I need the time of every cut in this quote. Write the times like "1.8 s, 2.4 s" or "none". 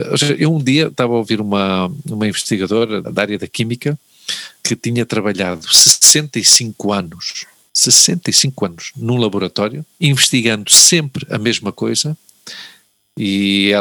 3.0 s